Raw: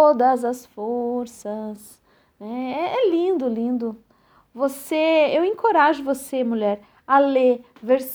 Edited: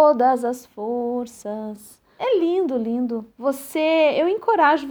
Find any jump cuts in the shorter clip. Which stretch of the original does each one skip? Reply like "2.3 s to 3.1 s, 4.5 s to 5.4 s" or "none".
2.2 s to 2.9 s, 4.0 s to 4.5 s